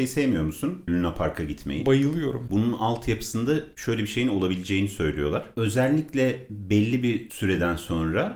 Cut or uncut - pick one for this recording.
cut